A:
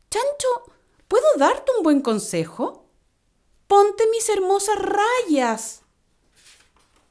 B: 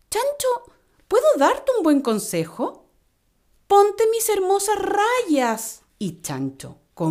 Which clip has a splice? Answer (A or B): B